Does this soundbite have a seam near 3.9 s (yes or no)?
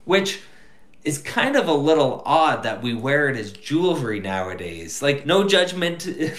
no